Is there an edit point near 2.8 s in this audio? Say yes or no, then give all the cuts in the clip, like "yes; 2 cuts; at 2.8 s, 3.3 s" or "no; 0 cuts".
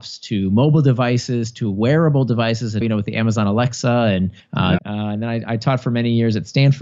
yes; 2 cuts; at 2.8 s, 4.8 s